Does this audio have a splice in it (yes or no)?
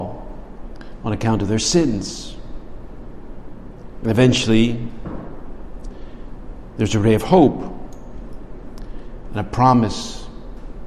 no